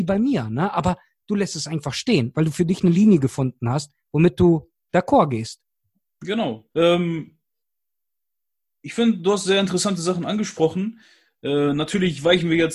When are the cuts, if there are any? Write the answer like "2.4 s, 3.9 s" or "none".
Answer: 6.7 s